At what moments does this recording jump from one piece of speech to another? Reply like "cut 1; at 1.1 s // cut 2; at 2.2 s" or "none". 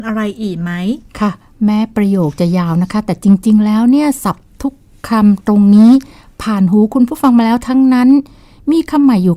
cut 1; at 1.1 s